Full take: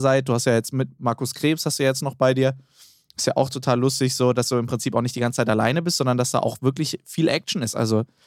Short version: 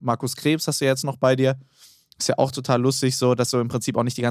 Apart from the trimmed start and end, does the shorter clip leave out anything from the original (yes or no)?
no